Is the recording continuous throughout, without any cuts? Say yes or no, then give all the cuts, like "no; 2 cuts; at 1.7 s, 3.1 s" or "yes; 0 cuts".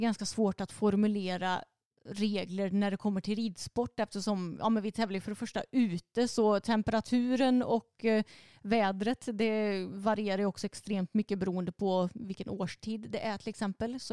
yes; 0 cuts